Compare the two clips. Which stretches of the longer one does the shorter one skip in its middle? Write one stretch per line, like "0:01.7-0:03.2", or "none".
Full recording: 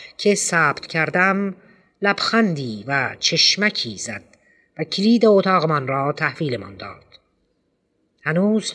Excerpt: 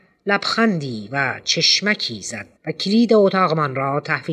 0:04.3-0:04.7